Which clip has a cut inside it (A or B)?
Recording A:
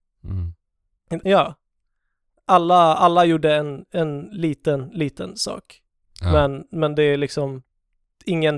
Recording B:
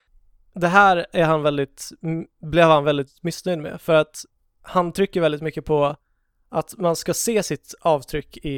A